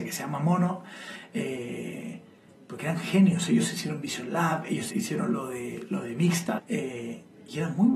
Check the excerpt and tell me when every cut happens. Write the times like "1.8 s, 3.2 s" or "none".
4.9 s, 6.6 s